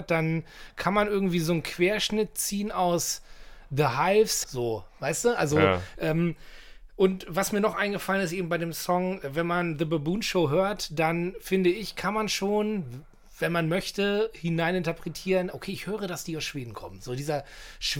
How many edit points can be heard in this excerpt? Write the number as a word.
two